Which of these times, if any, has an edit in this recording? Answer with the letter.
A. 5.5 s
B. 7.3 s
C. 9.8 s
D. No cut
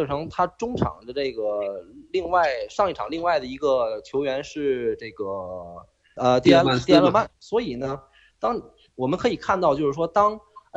B